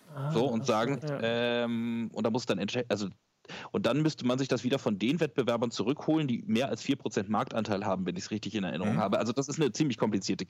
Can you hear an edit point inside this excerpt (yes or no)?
yes